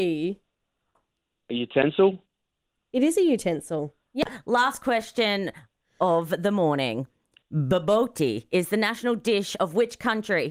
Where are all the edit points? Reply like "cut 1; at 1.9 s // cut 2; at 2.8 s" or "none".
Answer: none